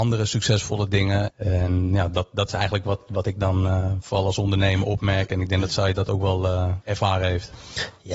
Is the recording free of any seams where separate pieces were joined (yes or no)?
no